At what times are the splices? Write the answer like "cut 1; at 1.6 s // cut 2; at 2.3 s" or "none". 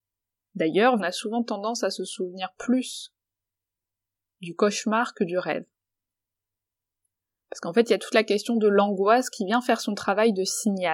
cut 1; at 1.0 s